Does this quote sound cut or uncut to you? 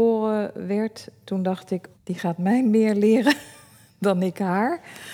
cut